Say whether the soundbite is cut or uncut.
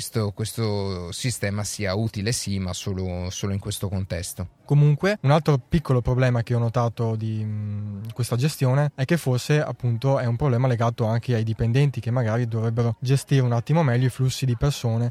cut